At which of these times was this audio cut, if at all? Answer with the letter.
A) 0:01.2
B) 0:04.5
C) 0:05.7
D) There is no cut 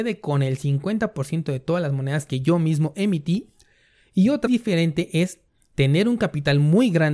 B